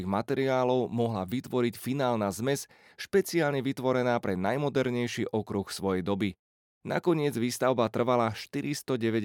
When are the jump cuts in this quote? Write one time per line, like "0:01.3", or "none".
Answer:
none